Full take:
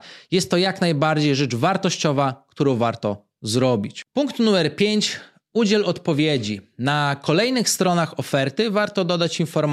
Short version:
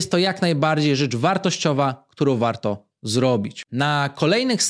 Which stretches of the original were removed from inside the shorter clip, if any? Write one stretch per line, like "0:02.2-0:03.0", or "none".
0:04.1-0:06.8